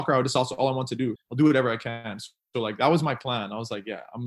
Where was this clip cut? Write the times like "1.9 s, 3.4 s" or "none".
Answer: 1.2 s